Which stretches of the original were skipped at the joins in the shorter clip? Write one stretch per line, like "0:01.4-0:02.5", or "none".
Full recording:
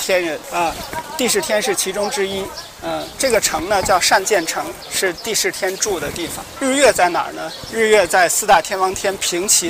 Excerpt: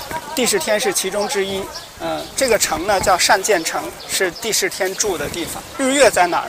none